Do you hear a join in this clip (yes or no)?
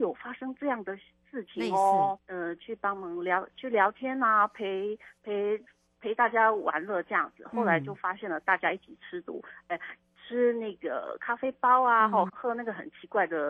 yes